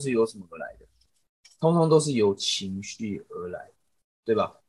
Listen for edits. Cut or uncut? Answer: uncut